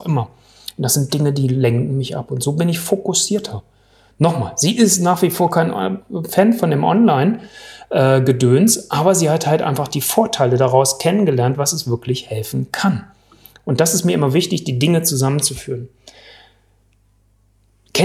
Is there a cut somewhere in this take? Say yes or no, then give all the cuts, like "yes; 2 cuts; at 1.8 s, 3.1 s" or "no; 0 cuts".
no; 0 cuts